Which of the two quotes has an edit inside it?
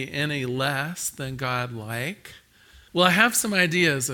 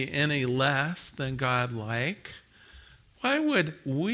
first; 1 cut; at 2.9 s

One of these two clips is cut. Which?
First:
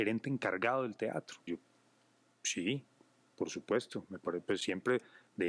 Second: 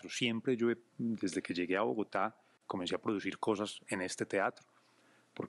first; 1 cut; at 1.5 s

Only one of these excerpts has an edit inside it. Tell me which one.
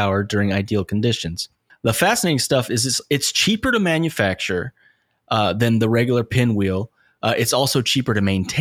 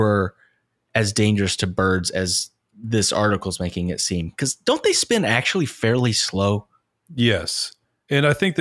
first; 1 cut; at 1.7 s

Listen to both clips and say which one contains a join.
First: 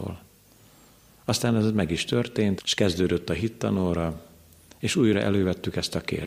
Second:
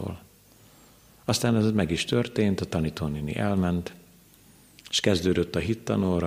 first; 1 cut; at 2.6 s

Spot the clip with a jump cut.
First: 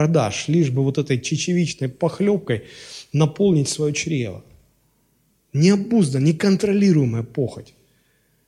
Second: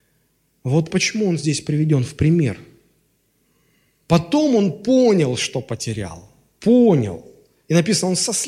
second; 1 cut; at 0.9 s

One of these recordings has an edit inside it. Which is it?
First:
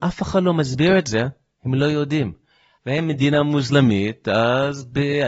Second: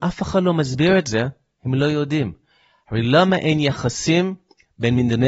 first; 1 cut; at 2.8 s

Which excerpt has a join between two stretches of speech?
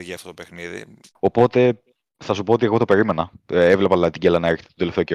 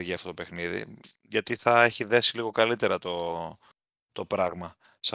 first; 1 cut; at 1.1 s

